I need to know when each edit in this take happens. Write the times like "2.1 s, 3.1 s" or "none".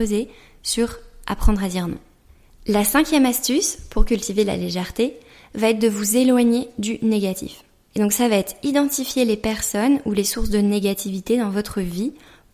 none

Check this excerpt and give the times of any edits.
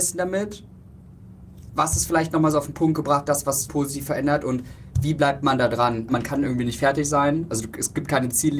3.7 s, 6.1 s

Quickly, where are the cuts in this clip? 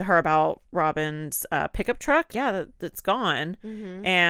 2.3 s

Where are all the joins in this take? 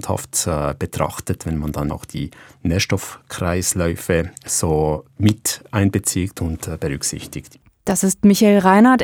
1.9 s

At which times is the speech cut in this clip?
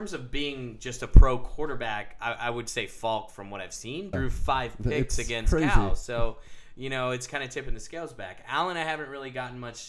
4.1 s

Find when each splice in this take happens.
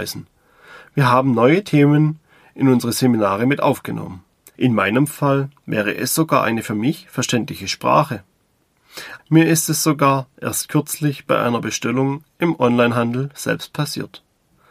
4.6 s, 9.2 s

